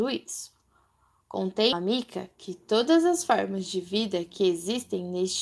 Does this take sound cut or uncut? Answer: cut